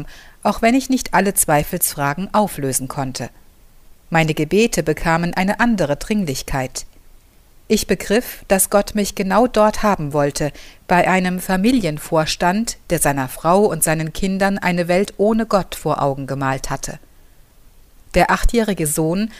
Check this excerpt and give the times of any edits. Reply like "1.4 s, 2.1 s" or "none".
none